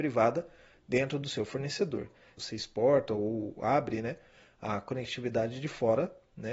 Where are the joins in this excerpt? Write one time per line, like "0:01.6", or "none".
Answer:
0:02.4